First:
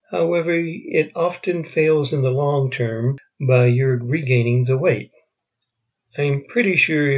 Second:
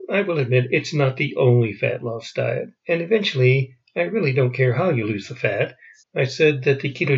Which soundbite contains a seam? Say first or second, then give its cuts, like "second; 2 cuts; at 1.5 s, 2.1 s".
second; 2 cuts; at 2.8 s, 6.0 s